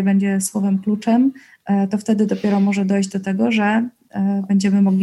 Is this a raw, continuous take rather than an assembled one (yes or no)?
yes